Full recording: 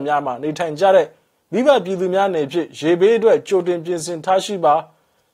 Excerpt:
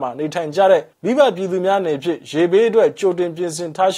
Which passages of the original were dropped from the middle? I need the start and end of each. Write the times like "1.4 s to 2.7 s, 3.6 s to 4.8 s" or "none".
1.2 s to 1.4 s